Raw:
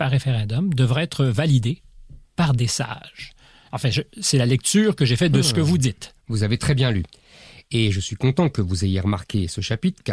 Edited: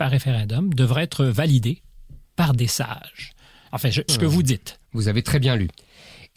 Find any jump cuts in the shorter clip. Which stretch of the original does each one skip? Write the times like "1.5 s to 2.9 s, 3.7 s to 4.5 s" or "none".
4.1 s to 5.4 s